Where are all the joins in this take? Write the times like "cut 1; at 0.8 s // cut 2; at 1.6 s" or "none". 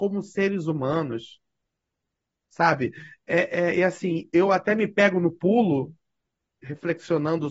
none